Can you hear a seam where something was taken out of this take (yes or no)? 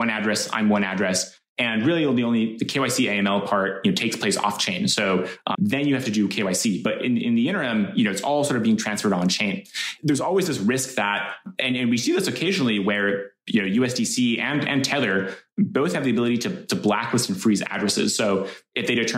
yes